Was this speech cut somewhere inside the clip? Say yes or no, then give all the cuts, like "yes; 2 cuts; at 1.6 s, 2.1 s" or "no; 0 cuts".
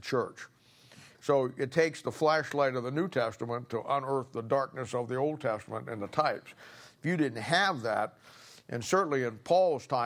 yes; 1 cut; at 1.1 s